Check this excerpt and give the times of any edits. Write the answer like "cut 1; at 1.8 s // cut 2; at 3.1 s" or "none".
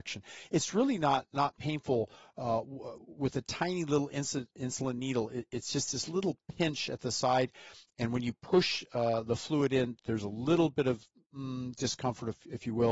none